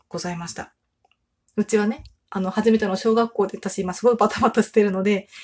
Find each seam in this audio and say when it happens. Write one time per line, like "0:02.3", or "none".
0:01.4